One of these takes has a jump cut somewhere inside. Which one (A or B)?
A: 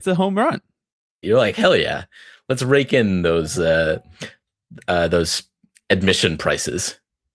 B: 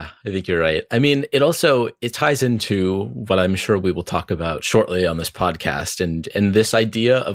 A